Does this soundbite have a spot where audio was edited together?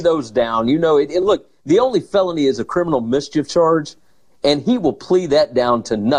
no; 0 cuts

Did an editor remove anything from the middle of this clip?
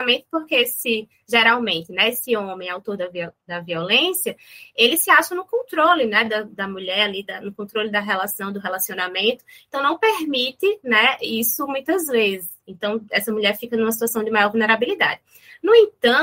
no; 0 cuts

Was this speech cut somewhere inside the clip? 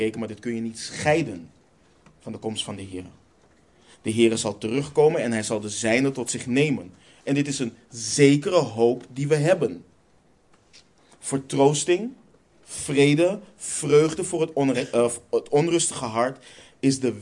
no; 0 cuts

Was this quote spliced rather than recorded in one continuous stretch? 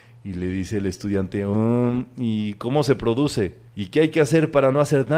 yes; 1 cut; at 3.7 s

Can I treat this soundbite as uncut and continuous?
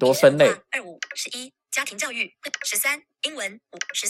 no; 1 cut; at 2.6 s

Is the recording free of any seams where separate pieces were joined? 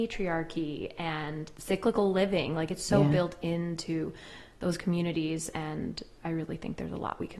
yes; 0 cuts

